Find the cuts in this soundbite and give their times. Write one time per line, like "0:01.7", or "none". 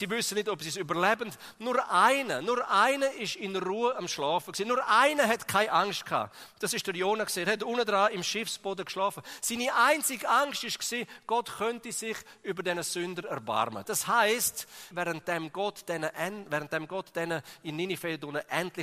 0:13.8
0:14.9

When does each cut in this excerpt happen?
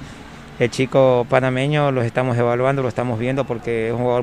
none

